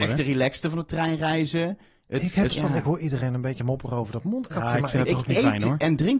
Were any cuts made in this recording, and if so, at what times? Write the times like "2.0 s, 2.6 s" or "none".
2.5 s